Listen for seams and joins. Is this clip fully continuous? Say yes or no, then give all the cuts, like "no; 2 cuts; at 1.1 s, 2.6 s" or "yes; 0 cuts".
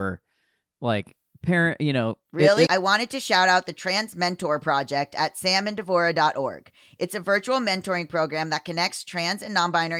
no; 1 cut; at 2.7 s